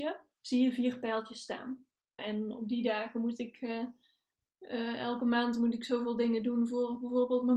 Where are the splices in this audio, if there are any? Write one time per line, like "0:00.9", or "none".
0:02.2